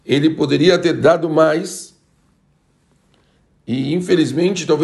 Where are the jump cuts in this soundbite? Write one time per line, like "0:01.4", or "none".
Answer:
none